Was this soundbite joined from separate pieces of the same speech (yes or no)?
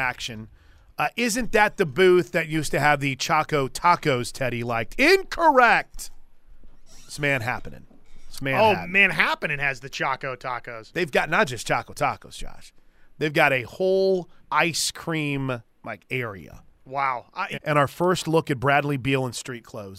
yes